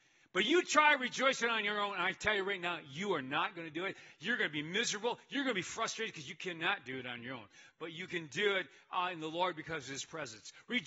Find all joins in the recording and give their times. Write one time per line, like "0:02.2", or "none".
none